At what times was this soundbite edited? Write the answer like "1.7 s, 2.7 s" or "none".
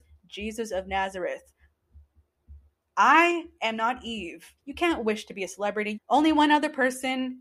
4.6 s, 5.9 s